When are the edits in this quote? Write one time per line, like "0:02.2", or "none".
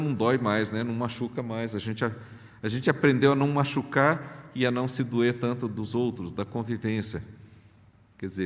none